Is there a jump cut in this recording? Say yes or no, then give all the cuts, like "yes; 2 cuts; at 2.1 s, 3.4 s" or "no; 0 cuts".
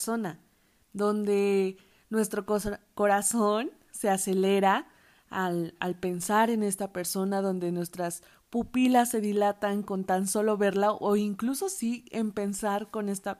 no; 0 cuts